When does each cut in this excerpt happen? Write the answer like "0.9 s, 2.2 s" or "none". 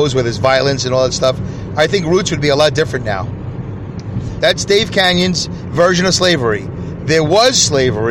4.4 s